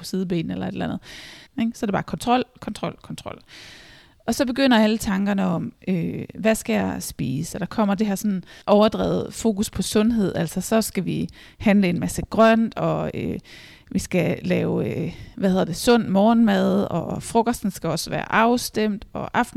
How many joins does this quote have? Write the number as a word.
three